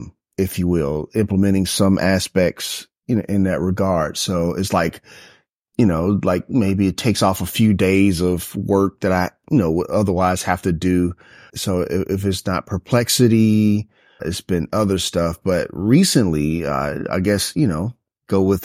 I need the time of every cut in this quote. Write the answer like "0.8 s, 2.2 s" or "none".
11.5 s, 14.2 s